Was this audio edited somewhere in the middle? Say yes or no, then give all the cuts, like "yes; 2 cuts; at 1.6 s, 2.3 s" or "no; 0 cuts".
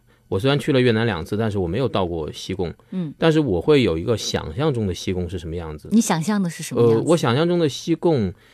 no; 0 cuts